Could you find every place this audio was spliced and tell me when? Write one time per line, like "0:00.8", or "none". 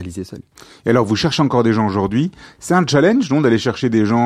none